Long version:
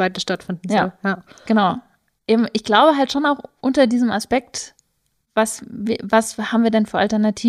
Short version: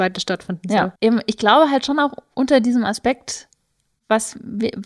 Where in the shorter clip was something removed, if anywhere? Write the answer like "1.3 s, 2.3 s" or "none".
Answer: 1.0 s